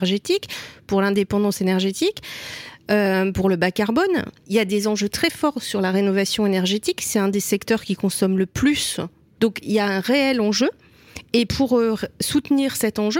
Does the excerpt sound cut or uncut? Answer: cut